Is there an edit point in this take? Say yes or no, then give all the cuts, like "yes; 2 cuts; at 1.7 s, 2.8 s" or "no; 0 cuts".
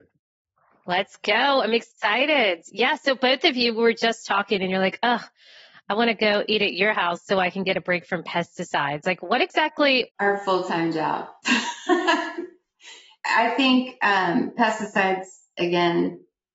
yes; 1 cut; at 10.1 s